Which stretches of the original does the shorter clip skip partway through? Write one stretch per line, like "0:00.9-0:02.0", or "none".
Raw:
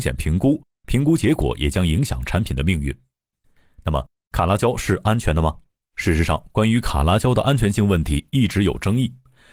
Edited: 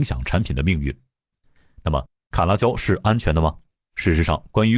none